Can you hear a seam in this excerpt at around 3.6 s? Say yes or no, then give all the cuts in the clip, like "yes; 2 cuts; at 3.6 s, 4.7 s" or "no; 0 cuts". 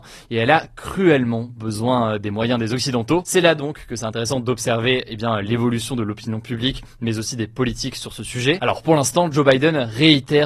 no; 0 cuts